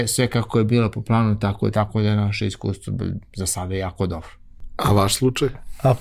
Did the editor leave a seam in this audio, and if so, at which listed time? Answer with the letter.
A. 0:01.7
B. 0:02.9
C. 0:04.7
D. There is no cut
A